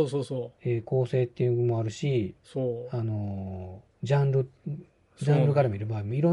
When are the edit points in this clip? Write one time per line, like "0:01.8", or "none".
0:03.9